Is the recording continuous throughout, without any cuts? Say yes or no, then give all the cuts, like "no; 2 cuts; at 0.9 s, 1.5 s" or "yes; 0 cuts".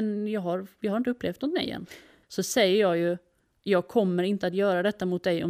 no; 1 cut; at 2.2 s